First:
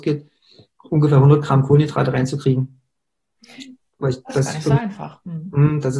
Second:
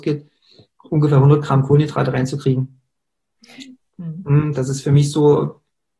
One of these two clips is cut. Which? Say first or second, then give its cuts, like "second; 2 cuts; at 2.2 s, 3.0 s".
second; 1 cut; at 4.0 s